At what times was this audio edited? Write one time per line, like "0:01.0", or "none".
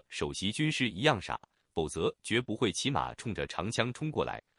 none

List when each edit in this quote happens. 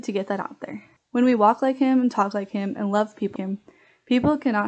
0:01.0
0:03.4

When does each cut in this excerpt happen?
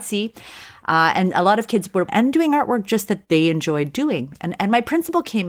0:02.1

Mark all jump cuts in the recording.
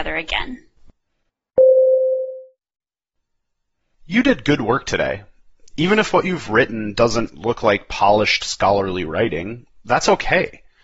none

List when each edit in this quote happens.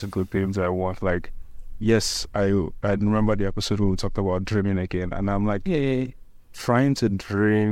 none

